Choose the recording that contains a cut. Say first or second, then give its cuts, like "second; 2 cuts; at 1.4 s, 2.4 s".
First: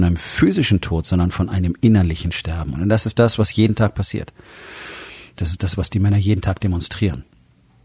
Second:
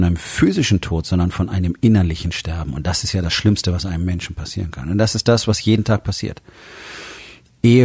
first; 2 cuts; at 2.7 s, 5.4 s